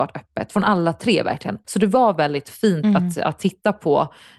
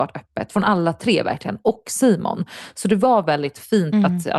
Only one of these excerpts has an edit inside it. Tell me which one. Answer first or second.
first